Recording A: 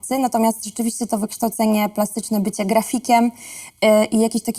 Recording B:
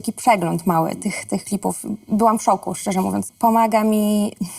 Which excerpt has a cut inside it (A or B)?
B